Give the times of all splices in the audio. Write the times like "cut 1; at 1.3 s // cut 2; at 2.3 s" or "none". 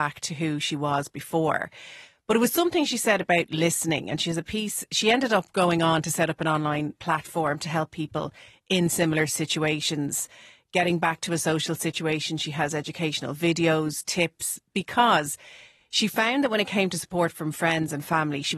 none